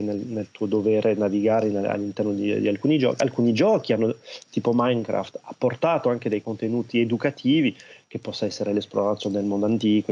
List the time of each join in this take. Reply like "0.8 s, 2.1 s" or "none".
none

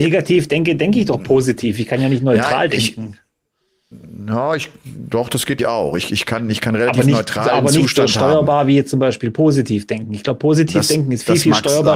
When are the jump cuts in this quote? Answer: 5.6 s

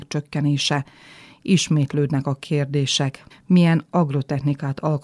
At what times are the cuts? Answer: 3.3 s

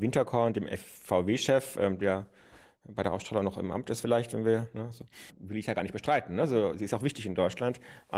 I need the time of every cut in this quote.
5.3 s

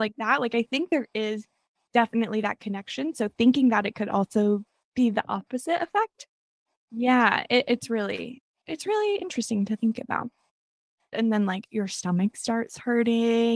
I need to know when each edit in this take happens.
11.1 s

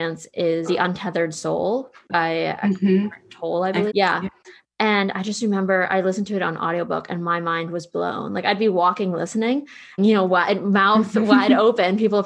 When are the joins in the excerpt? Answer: 3.9 s, 10.0 s

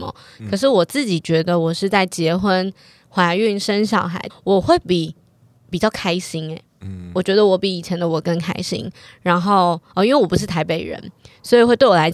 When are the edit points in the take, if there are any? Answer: 4.3 s

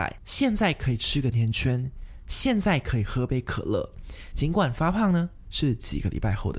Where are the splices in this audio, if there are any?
1.3 s, 4.3 s

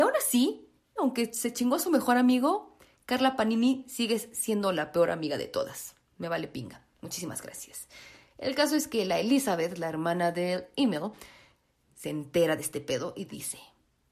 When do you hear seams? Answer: 1.0 s

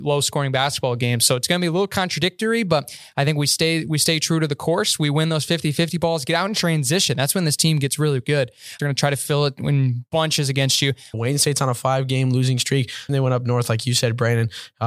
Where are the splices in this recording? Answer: 8.8 s, 11.1 s, 13.1 s

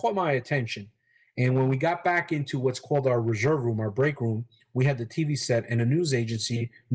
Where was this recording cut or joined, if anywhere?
none

